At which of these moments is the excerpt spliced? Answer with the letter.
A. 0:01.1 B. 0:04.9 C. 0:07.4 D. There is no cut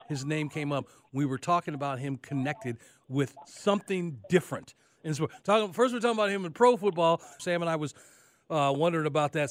C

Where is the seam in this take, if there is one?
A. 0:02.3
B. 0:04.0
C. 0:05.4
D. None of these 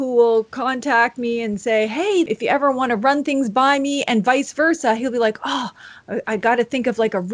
A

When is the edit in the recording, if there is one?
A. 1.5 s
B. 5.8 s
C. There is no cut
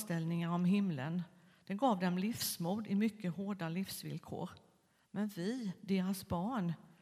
C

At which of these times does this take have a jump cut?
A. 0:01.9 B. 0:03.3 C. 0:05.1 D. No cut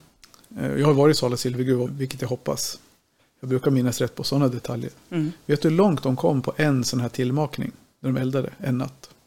A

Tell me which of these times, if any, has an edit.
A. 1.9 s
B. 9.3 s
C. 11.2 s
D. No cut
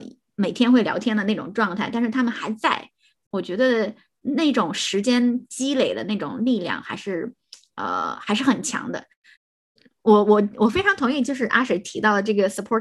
D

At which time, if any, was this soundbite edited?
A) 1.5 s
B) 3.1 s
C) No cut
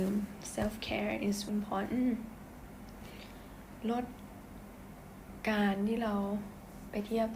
A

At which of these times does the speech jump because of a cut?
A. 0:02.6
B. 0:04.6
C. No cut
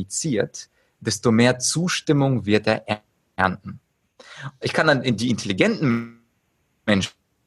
B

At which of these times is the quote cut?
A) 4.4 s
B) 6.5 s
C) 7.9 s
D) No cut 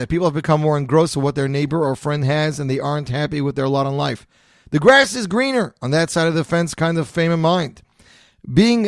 D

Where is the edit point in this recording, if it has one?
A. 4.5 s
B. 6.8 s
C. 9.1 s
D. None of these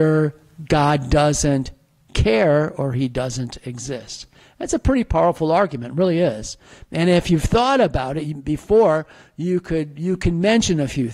D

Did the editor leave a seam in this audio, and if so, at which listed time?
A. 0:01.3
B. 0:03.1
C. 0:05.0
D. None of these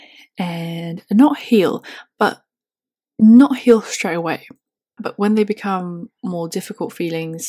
C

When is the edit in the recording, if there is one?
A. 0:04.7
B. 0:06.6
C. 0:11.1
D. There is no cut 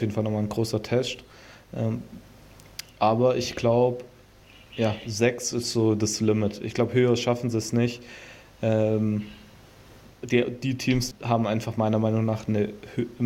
C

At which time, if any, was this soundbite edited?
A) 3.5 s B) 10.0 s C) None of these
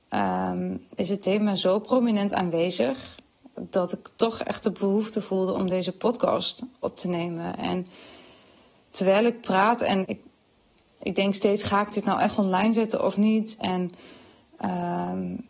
B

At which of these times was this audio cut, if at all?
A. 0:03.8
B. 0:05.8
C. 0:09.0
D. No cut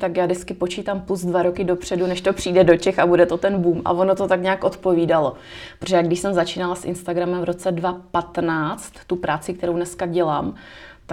D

